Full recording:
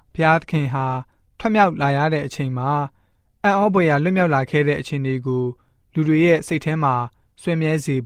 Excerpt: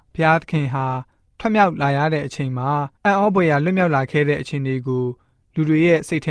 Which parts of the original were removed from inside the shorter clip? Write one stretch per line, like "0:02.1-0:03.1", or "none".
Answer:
0:03.0-0:03.4